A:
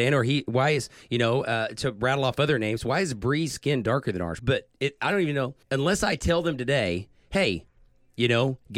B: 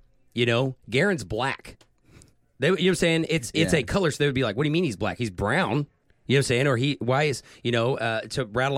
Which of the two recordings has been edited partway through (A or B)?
A